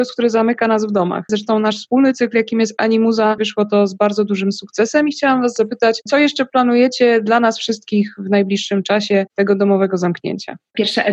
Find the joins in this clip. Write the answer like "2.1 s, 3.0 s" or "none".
1.3 s, 3.4 s